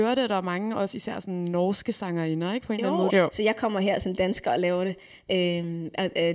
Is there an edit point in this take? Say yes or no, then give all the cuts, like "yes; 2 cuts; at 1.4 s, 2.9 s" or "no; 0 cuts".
yes; 2 cuts; at 3.1 s, 5.3 s